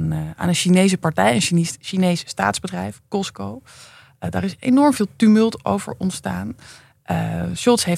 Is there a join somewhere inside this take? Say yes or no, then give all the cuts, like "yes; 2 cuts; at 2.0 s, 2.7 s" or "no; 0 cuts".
no; 0 cuts